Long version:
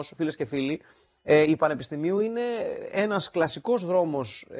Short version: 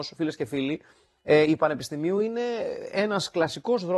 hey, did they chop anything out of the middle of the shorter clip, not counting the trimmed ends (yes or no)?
no